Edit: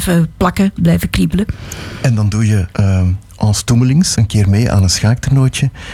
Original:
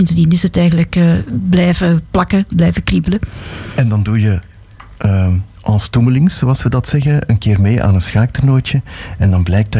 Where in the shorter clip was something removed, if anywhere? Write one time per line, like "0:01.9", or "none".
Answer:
0:02.7
0:04.1